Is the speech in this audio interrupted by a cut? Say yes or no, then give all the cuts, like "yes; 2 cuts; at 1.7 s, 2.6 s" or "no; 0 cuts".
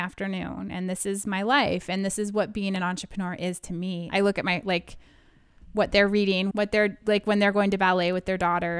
yes; 2 cuts; at 4.1 s, 6.5 s